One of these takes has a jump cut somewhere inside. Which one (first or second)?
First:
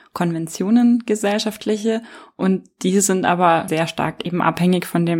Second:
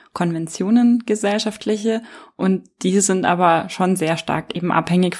first